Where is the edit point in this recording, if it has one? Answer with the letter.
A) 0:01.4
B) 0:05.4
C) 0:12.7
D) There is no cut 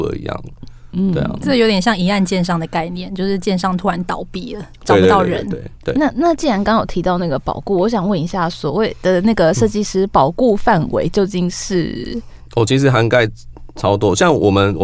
D